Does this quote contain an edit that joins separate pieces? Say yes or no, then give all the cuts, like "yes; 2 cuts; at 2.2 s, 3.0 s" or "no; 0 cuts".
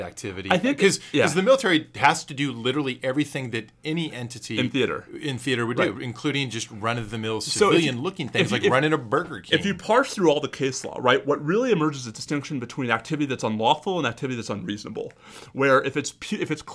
no; 0 cuts